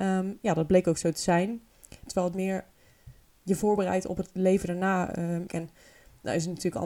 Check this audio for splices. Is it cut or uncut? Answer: cut